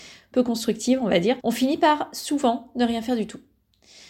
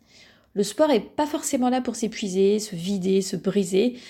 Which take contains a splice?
first; 1 cut; at 1.4 s

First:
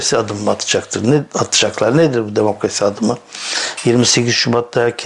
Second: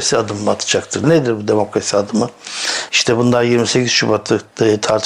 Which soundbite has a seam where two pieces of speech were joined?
second; 2 cuts; at 1.0 s, 2.9 s

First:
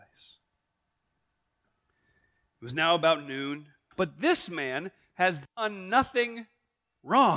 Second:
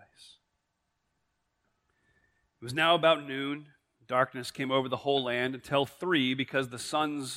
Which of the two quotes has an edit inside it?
first; 1 cut; at 3.9 s

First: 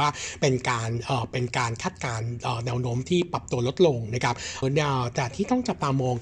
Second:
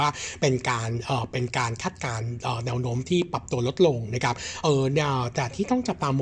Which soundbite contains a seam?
first; 1 cut; at 4.6 s

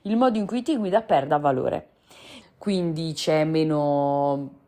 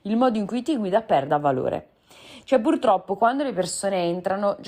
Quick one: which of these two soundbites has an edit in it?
first; 1 cut; at 2.4 s

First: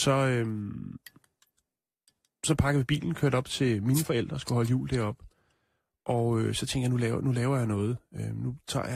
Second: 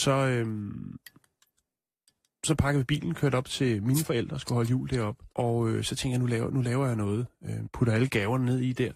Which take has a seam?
second; 2 cuts; at 5.3 s, 7.7 s

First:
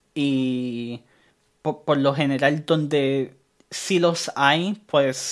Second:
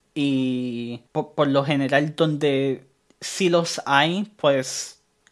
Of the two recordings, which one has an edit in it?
second; 1 cut; at 1.1 s

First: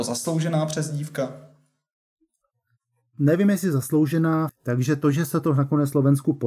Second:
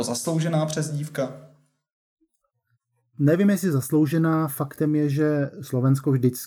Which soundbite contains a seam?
first; 1 cut; at 4.5 s

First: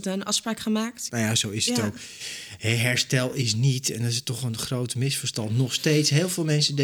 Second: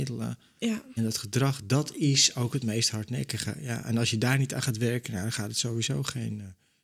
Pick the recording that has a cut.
first; 1 cut; at 1.1 s

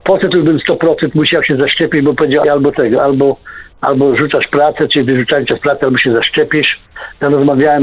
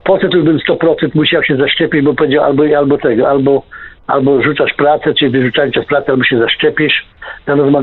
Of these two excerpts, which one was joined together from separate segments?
first; 1 cut; at 2.4 s

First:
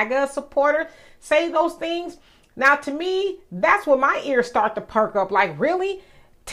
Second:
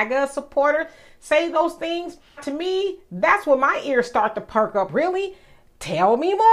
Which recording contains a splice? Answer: second; 2 cuts; at 2.4 s, 4.9 s

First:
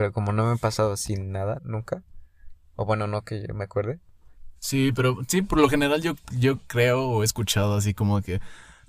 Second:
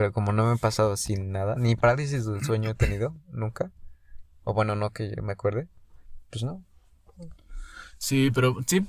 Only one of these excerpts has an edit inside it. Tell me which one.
first; 2 cuts; at 1.6 s, 4.6 s

